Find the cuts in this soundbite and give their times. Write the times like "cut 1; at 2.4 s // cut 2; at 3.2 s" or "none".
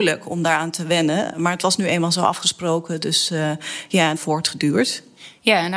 cut 1; at 4.2 s